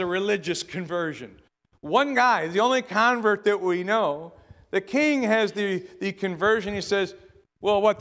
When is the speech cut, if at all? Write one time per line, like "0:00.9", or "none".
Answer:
none

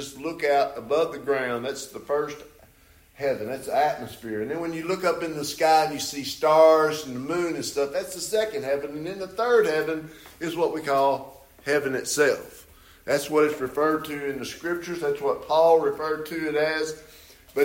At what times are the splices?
none

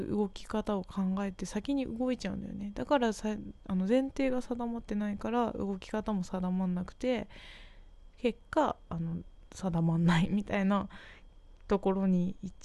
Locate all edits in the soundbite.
0:09.5

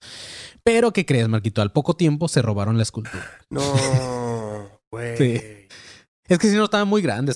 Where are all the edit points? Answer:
none

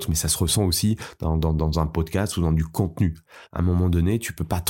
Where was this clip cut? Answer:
none

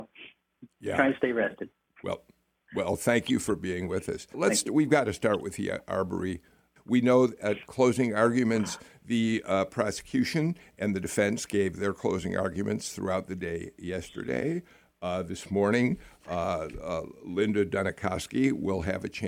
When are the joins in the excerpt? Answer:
0:04.3
0:06.8

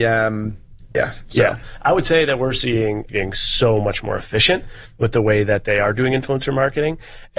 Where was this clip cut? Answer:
0:00.9
0:03.1

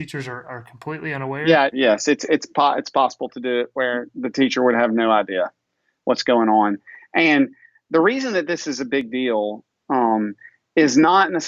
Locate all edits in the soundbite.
0:01.7

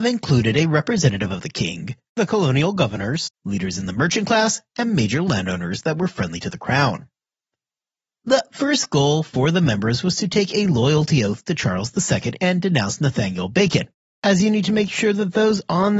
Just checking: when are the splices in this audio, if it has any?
0:03.3

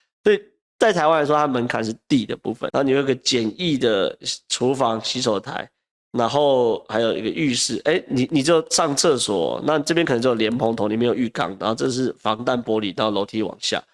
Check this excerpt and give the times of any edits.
0:02.7

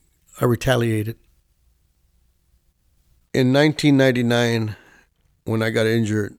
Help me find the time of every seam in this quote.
none

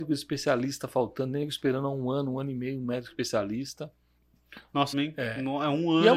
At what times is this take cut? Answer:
0:04.9

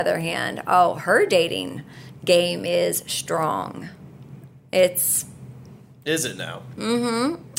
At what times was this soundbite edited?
none

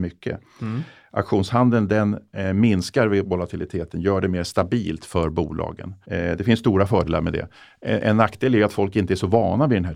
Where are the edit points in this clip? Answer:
0:06.0

